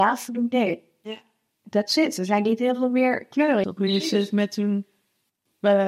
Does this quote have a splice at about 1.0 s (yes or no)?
no